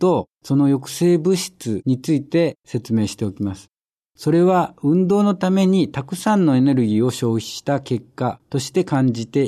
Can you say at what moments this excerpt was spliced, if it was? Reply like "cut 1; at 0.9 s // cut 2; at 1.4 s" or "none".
cut 1; at 4.1 s